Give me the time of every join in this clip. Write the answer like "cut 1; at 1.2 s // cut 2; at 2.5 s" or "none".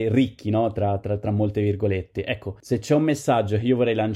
none